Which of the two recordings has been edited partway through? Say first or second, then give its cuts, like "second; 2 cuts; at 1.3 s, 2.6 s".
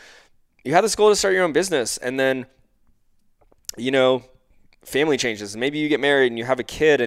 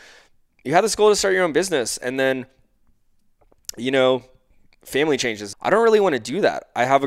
second; 1 cut; at 5.5 s